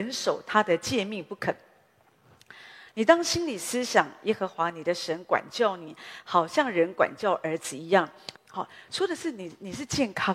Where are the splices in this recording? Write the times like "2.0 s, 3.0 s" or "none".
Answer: 2.9 s, 8.4 s